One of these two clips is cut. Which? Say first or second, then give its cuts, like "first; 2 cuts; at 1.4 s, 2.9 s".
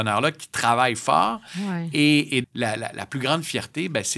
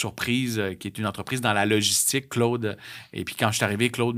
first; 1 cut; at 2.4 s